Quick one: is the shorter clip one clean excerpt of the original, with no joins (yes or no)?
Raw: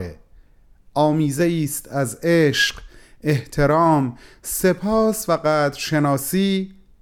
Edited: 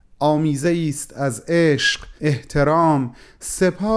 no